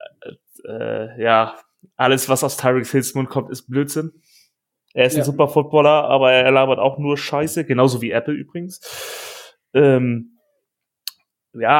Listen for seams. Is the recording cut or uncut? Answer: uncut